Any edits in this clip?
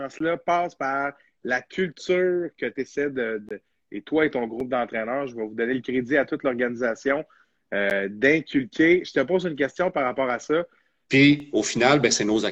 yes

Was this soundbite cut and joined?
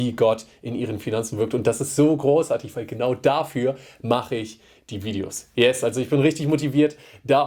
no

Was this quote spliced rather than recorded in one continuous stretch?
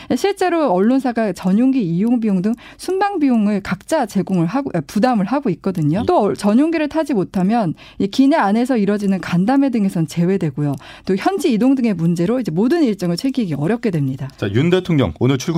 yes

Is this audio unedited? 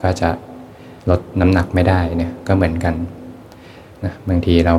no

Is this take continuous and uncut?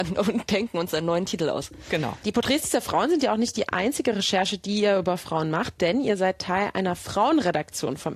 yes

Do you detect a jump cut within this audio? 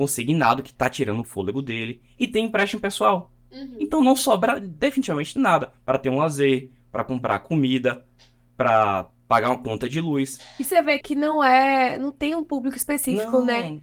yes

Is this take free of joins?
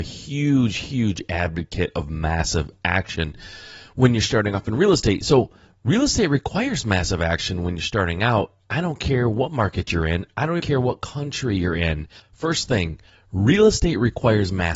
no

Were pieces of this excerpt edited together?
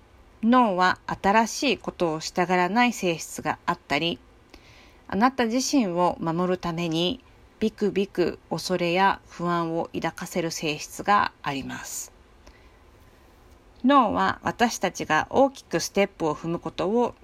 no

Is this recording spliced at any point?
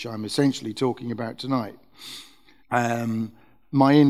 yes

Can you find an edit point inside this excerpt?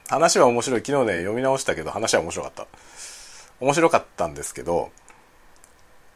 no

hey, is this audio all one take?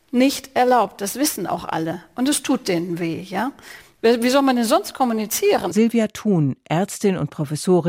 no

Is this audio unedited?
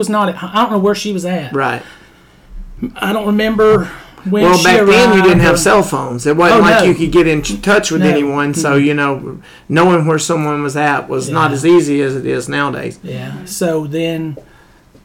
yes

